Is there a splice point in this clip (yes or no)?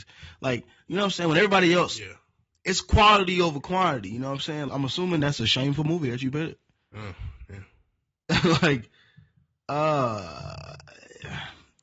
yes